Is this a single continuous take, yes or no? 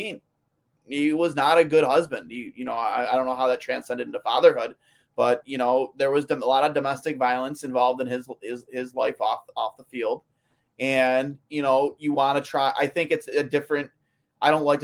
yes